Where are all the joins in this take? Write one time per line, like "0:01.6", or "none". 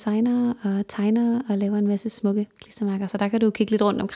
none